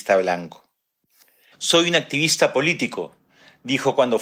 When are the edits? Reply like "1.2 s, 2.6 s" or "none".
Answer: 1.5 s